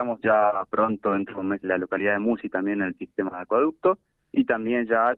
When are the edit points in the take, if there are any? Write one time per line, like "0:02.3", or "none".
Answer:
0:01.6